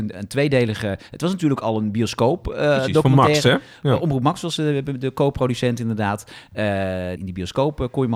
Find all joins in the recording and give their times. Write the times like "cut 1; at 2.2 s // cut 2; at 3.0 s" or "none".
cut 1; at 7.2 s